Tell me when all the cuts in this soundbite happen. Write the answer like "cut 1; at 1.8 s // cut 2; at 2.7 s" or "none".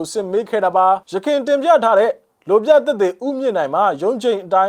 cut 1; at 1.0 s